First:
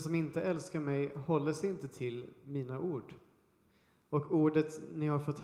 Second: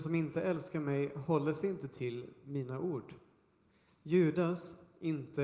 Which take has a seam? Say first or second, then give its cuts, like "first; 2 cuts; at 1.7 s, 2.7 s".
second; 1 cut; at 3.9 s